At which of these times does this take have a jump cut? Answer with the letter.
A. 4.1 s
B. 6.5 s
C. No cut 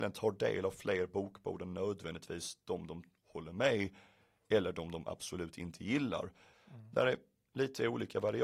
B